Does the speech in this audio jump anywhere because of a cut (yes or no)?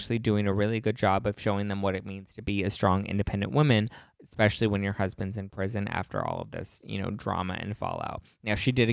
no